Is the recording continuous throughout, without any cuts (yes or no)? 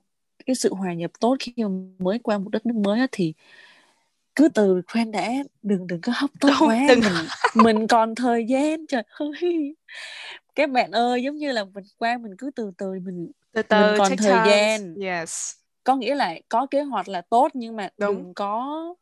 no